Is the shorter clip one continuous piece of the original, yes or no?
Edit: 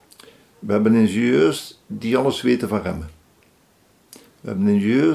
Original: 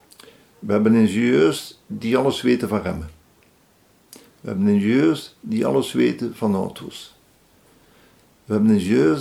yes